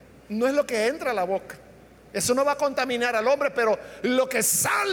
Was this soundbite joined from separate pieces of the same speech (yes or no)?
no